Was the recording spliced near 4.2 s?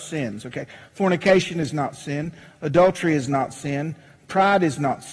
no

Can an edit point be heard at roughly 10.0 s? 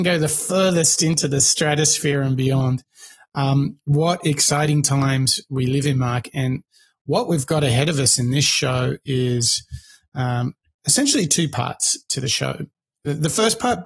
no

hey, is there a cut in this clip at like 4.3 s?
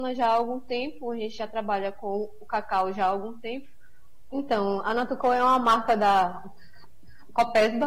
yes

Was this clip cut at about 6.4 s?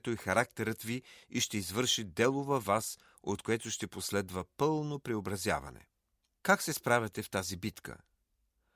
yes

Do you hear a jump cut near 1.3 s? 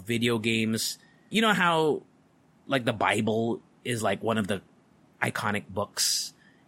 yes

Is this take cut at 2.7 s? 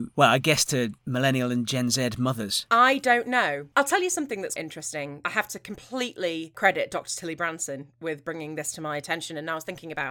no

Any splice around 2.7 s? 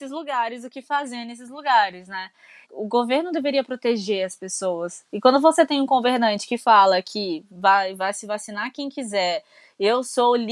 yes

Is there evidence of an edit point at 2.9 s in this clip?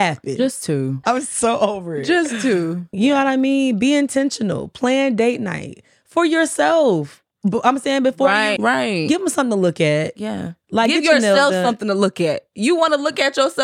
yes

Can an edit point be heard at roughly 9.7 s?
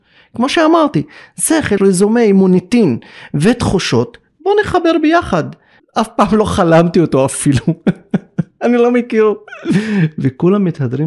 no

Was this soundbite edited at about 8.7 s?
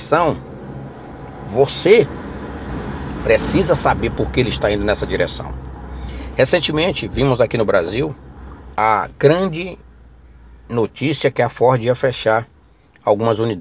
yes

